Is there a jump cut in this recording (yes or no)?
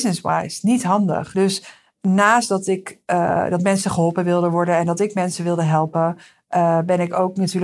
no